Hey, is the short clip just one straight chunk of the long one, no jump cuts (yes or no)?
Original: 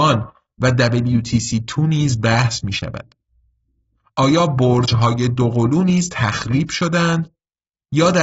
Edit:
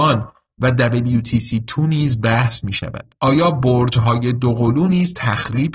no